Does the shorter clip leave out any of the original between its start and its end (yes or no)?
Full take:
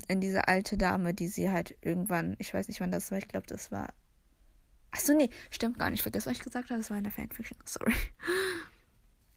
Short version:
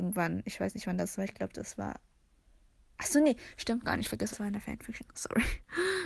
yes